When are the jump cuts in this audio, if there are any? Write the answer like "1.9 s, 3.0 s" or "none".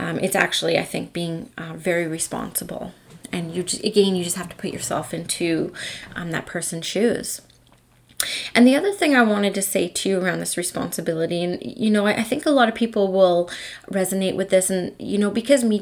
none